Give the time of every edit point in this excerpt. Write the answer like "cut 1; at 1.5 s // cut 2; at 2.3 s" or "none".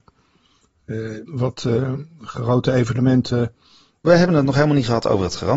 cut 1; at 1.3 s // cut 2; at 4.0 s